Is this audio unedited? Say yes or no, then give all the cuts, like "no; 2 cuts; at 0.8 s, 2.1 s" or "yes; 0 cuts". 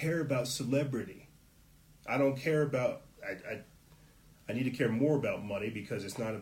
yes; 0 cuts